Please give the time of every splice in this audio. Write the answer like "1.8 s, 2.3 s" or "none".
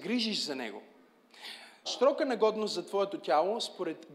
1.9 s